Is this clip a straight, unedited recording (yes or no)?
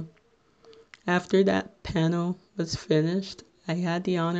no